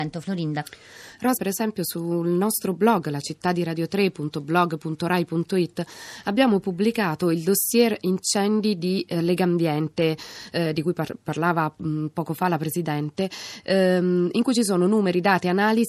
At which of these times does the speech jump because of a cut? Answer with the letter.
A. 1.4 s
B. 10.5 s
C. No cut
A